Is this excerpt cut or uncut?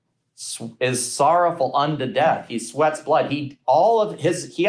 uncut